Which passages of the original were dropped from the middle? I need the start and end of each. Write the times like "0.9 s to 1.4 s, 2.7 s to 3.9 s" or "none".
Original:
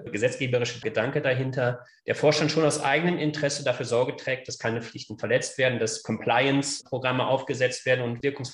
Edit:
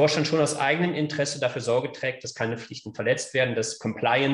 none